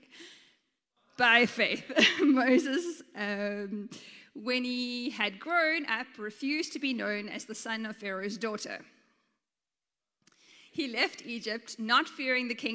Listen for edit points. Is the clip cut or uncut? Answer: cut